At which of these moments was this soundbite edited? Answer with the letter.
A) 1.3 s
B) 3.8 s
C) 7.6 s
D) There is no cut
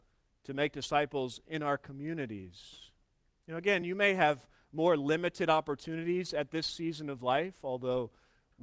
D